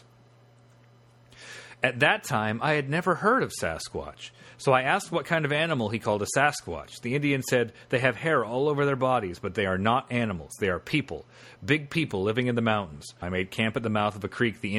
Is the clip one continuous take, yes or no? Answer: no